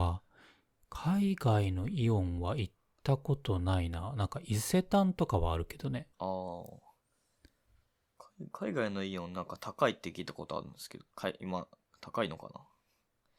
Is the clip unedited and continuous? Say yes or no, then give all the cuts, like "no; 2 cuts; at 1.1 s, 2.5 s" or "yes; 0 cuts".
no; 1 cut; at 6.1 s